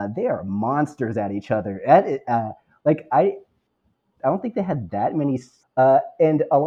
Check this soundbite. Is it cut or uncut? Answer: cut